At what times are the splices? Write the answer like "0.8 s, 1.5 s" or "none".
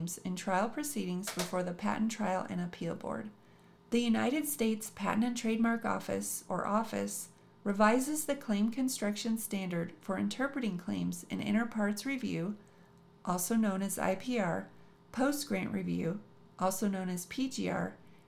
3.8 s, 6.5 s